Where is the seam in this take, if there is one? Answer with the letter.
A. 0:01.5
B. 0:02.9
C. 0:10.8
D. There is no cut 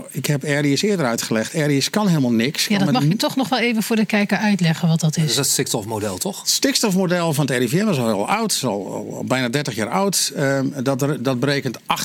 D